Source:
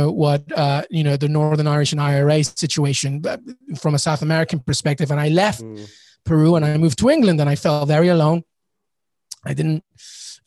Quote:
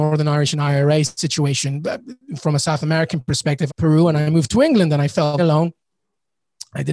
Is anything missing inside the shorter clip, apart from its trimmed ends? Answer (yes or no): yes